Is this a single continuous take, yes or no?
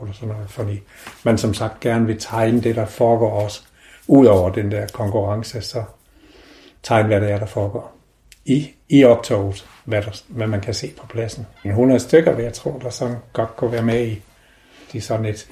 no